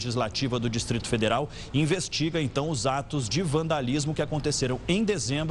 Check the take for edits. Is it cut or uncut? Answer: uncut